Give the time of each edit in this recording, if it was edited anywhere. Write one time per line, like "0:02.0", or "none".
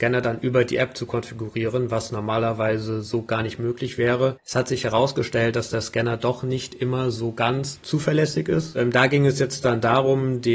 0:04.4